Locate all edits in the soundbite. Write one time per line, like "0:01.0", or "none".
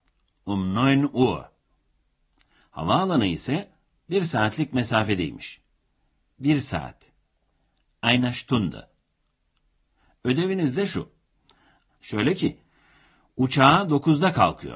0:11.9